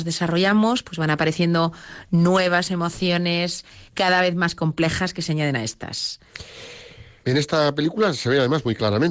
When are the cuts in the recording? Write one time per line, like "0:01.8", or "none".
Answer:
0:03.9
0:07.2